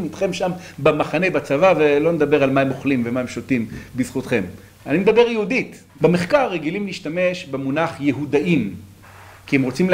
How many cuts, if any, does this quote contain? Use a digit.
1